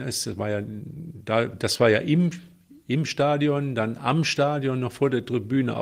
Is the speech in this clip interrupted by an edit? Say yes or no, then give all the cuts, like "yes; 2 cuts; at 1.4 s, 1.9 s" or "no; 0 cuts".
no; 0 cuts